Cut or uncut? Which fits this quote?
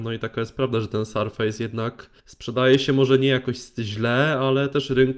cut